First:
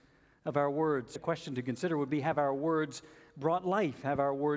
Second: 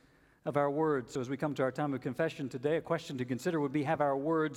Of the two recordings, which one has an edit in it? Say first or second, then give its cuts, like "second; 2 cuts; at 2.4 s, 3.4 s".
first; 1 cut; at 1.2 s